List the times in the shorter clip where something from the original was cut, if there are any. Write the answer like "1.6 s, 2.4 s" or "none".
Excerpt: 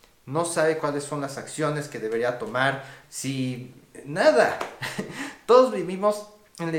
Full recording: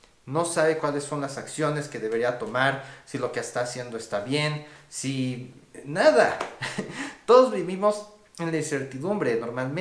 3.0 s